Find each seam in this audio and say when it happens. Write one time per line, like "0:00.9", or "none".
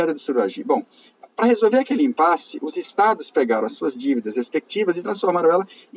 0:01.2